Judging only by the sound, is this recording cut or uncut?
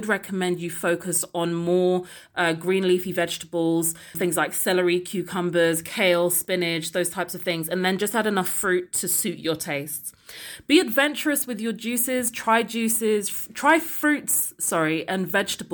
cut